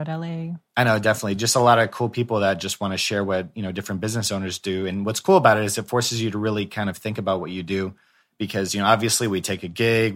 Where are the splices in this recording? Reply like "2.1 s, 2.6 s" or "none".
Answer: none